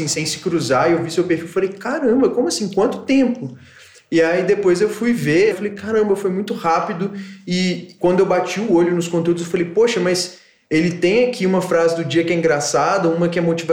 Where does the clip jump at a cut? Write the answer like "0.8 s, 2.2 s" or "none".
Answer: 5.5 s